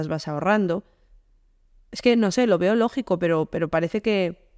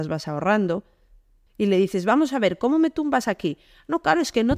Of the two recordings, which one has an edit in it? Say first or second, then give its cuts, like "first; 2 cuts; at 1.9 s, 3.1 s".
second; 1 cut; at 1.5 s